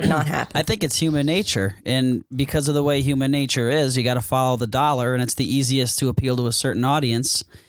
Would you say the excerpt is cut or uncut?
uncut